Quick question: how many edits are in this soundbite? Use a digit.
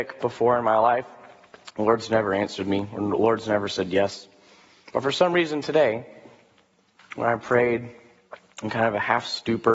0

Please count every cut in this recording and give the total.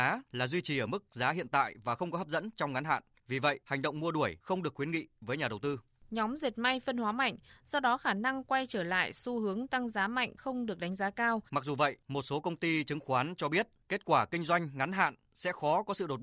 2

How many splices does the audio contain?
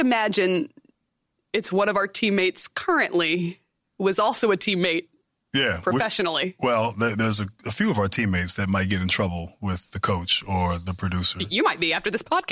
0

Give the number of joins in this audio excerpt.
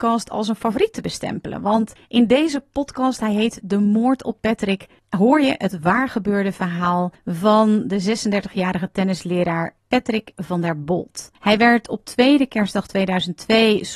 0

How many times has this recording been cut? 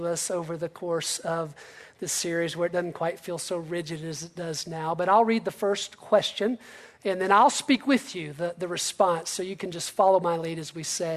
0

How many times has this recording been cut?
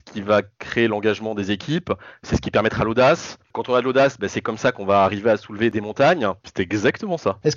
1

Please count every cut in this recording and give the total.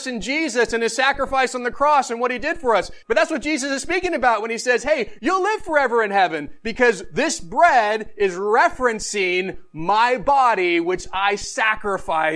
2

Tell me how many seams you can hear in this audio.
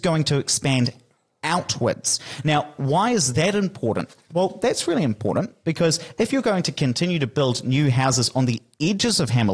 0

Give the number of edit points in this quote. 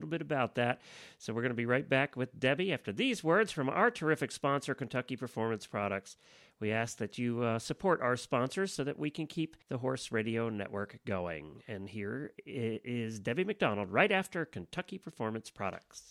1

